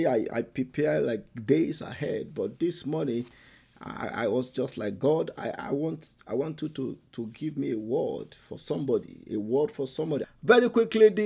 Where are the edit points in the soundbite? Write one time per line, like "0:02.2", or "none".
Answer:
0:10.2